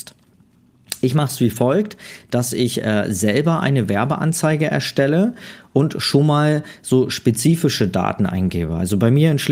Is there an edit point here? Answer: no; 0 cuts

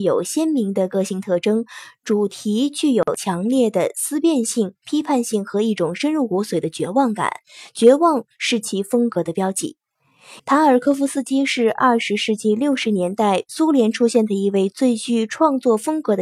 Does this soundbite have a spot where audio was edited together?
yes; 1 cut; at 10.4 s

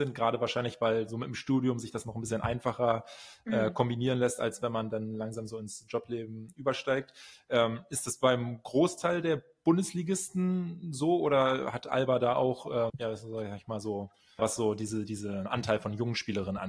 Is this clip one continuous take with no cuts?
no; 2 cuts; at 12.9 s, 14.4 s

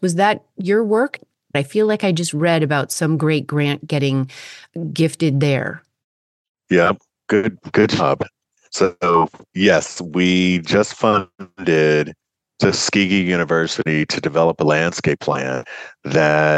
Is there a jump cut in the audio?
no; 0 cuts

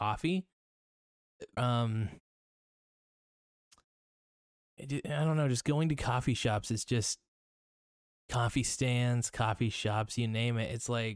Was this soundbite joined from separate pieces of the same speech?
yes; 1 cut; at 1.6 s

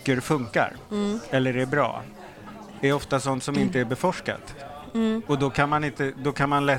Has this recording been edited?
no; 0 cuts

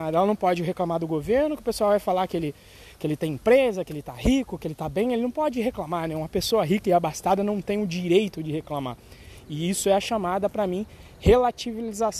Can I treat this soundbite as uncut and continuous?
yes; 0 cuts

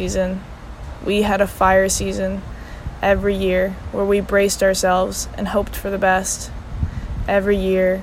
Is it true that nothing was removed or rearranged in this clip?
yes; 0 cuts

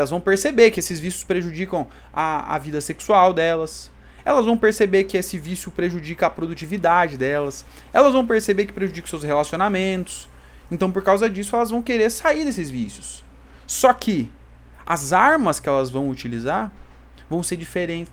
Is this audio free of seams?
yes; 0 cuts

